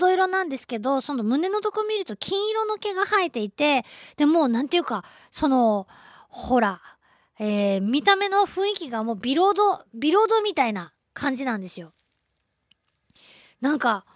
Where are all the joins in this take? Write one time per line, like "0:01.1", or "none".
none